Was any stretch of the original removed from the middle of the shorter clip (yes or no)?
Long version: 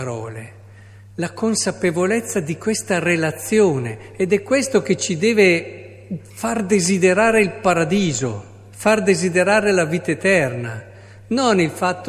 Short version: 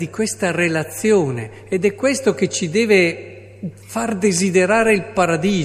no